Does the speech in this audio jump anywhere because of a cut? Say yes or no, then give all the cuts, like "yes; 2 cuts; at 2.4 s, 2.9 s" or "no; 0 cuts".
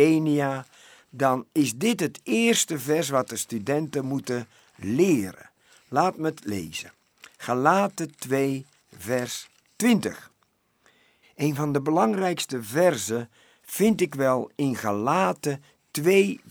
yes; 1 cut; at 11.2 s